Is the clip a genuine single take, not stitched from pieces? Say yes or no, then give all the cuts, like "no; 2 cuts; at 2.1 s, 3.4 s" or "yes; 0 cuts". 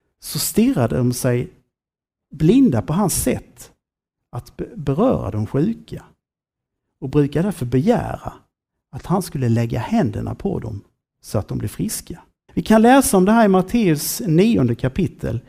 no; 1 cut; at 12.5 s